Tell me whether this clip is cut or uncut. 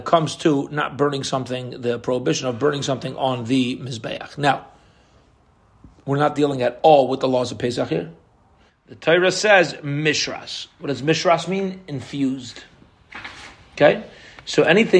cut